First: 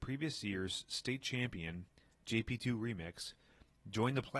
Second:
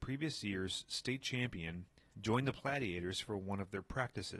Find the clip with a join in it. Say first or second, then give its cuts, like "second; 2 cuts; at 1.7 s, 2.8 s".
second; 1 cut; at 2.1 s